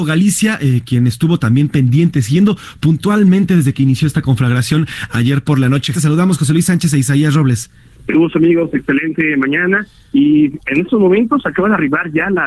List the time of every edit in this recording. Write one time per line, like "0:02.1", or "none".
0:05.9